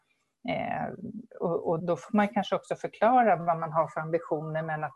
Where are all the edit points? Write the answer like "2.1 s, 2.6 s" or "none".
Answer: 1.8 s